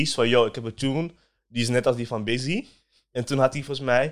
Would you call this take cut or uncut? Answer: uncut